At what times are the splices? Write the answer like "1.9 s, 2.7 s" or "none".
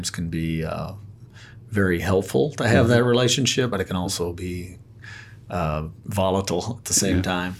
none